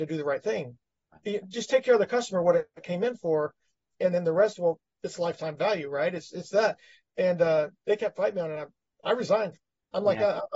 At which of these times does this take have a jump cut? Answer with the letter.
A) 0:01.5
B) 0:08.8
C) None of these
C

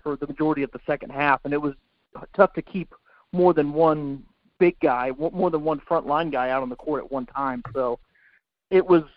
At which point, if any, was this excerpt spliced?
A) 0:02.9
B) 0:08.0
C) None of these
C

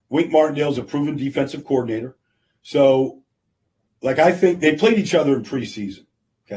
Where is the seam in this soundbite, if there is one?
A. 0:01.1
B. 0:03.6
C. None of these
C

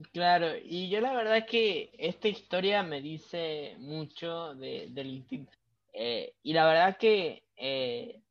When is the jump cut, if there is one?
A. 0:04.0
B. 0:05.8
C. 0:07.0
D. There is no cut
B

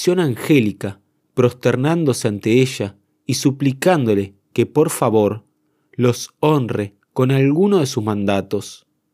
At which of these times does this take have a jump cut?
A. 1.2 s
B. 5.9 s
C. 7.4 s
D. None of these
A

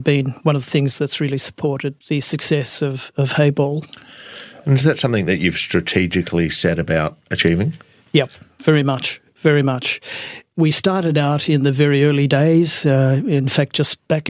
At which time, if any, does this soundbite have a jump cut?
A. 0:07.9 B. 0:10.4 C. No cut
C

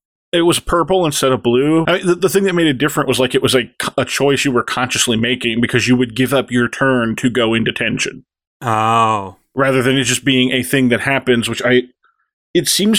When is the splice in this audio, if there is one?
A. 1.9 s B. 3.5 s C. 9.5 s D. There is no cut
A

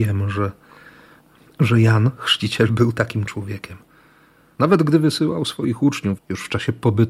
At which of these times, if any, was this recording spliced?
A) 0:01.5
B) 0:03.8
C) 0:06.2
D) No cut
C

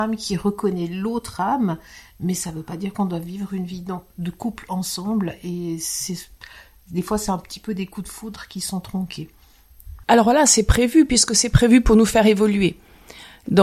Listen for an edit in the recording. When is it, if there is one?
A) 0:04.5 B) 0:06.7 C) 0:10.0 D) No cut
C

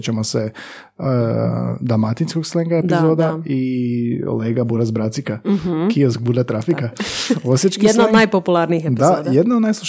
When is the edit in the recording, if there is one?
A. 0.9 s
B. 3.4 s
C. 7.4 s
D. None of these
D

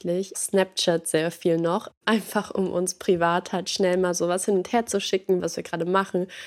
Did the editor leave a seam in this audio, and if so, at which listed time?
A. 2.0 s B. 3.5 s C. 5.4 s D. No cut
C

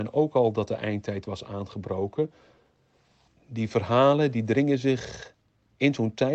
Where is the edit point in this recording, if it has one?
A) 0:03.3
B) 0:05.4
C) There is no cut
A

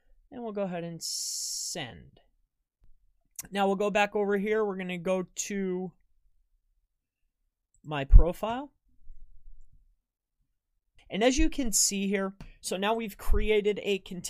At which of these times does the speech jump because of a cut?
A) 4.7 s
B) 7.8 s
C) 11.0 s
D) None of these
C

